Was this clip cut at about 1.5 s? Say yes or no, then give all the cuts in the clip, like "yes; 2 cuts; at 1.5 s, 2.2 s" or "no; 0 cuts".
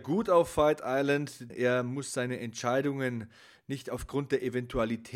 yes; 1 cut; at 1.5 s